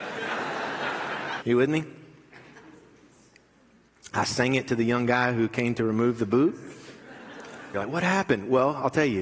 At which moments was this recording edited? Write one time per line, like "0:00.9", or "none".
0:01.4
0:07.7